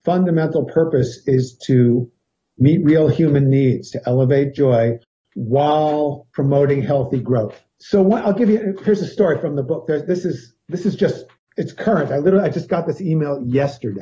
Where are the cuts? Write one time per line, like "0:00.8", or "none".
0:03.9